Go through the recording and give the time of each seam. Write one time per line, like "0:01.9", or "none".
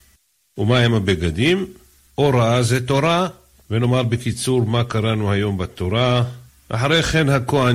0:02.1
0:06.5